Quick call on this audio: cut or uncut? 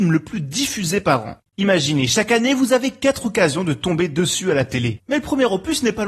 uncut